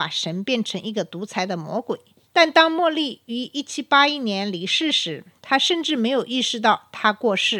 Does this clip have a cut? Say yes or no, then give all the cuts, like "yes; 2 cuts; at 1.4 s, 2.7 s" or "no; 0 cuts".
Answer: yes; 1 cut; at 2.3 s